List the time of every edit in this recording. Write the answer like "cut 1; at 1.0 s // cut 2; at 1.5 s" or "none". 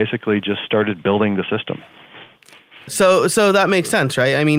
cut 1; at 2.9 s